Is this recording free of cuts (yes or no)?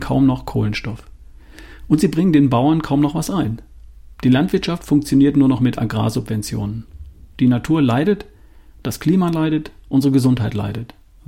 yes